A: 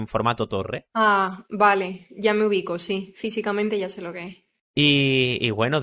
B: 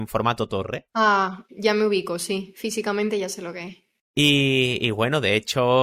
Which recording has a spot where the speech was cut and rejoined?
B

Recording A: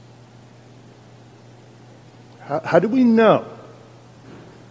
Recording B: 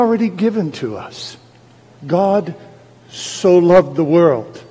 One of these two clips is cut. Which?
B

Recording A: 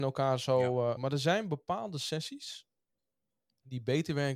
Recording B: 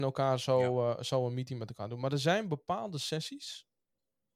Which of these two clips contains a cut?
A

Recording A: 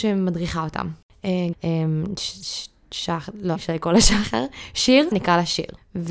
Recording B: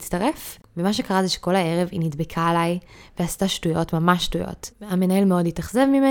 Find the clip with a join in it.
A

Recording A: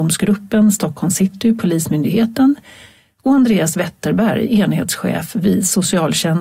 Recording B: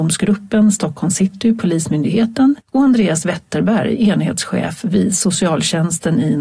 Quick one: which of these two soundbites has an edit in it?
B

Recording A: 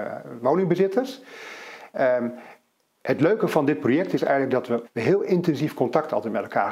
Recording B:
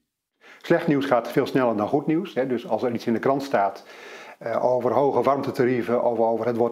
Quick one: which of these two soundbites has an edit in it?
A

